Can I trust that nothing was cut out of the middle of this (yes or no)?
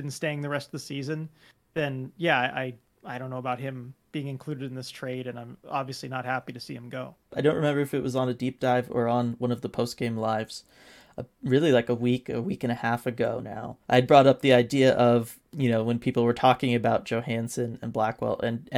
no